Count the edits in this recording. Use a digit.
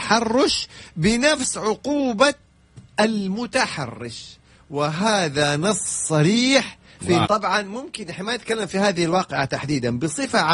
1